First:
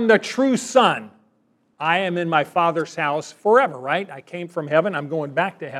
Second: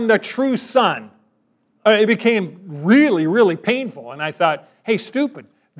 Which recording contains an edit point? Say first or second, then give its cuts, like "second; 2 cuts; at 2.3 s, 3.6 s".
second; 1 cut; at 1.7 s